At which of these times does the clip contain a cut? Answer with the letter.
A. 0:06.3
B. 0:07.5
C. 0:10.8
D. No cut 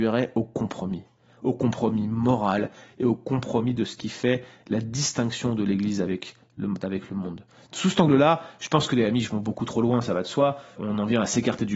C